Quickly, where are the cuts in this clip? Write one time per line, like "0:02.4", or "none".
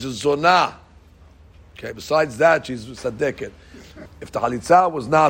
0:04.1

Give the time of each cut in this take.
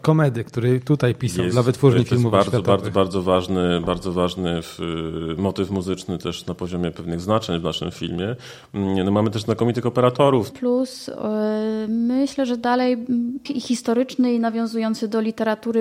0:10.5
0:13.5

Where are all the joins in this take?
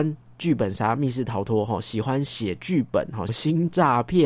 0:03.3

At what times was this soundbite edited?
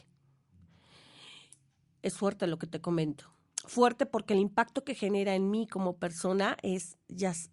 none

